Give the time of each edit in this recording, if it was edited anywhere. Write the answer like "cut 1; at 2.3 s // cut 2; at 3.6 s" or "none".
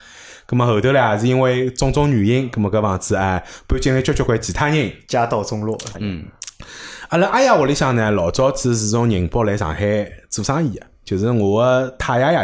cut 1; at 4.3 s // cut 2; at 5.9 s

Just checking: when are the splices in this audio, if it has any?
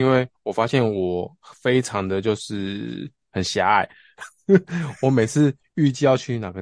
none

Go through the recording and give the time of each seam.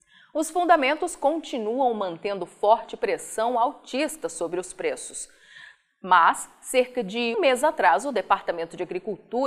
cut 1; at 7.3 s

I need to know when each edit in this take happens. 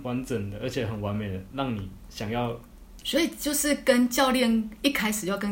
cut 1; at 3.0 s

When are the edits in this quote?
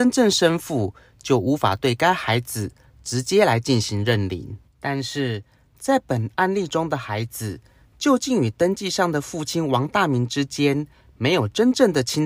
cut 1; at 4.7 s

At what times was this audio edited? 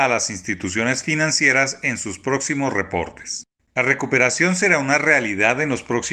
none

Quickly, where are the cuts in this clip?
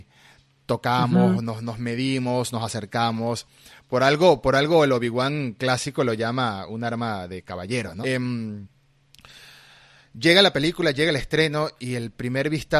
cut 1; at 8.0 s

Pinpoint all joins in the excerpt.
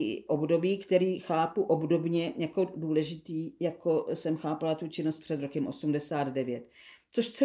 none

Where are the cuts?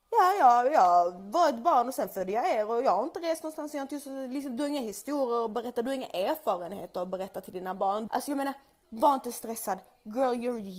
cut 1; at 8.1 s

